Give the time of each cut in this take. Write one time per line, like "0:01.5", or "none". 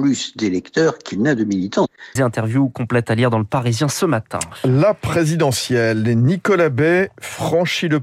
0:02.2